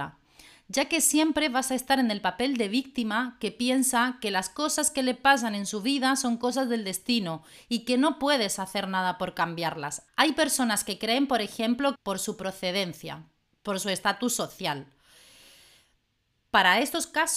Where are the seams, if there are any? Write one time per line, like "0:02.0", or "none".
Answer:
0:10.1
0:11.9